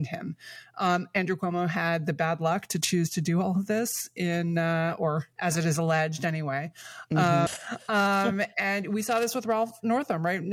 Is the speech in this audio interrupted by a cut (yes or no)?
yes